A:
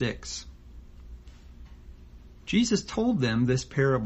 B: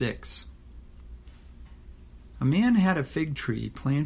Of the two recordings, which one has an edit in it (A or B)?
B